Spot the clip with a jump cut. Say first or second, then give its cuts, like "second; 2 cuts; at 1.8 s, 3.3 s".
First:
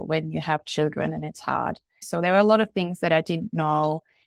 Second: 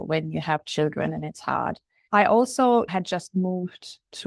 first; 1 cut; at 2.0 s